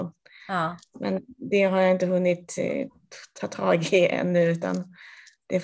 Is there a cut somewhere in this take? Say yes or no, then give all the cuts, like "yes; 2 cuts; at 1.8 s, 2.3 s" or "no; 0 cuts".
no; 0 cuts